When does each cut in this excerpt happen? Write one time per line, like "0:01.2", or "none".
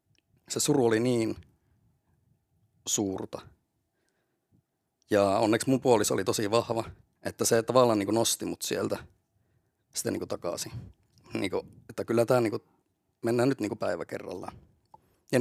none